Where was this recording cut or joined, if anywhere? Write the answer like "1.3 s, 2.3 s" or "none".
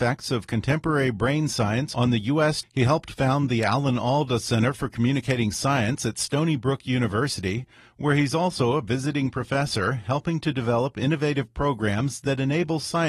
2.6 s